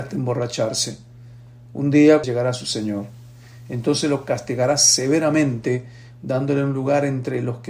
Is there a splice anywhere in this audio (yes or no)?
yes